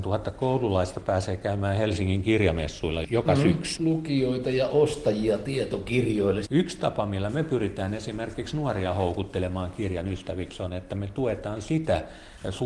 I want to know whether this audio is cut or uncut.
cut